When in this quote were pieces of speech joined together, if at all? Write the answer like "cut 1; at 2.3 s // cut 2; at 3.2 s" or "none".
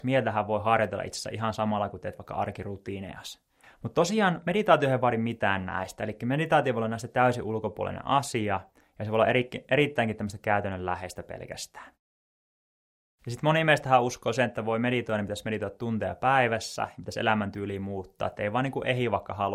cut 1; at 3.6 s